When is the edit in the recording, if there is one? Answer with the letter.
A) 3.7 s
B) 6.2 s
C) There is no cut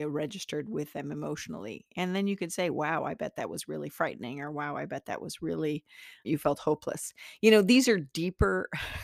B